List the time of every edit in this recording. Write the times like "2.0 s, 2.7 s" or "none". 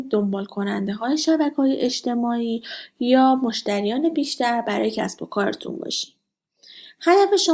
none